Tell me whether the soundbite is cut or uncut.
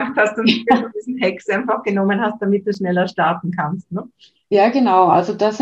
uncut